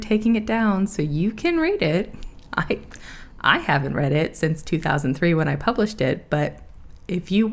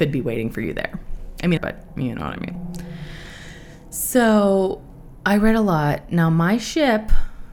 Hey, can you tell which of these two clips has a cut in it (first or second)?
second